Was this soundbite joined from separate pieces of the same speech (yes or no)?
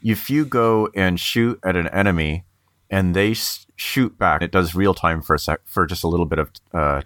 yes